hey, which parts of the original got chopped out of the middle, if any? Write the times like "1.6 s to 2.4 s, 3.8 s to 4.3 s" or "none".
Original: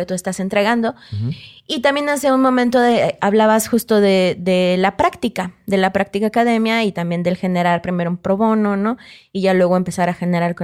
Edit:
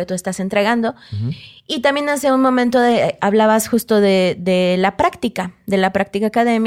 none